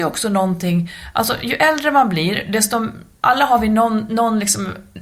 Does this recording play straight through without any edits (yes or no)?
yes